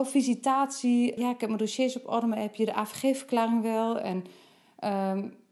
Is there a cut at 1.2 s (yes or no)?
yes